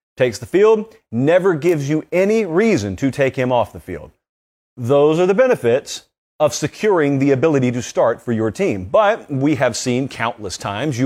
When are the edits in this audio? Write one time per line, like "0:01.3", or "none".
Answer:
none